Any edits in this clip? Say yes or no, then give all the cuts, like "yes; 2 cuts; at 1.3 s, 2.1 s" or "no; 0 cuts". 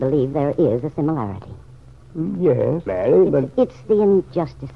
yes; 1 cut; at 2.9 s